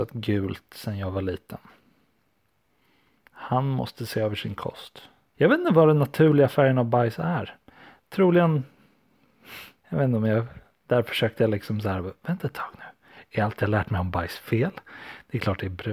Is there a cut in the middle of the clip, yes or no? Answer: yes